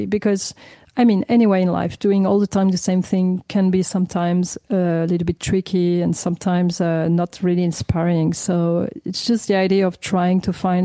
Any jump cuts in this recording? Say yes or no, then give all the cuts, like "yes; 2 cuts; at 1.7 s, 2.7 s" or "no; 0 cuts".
no; 0 cuts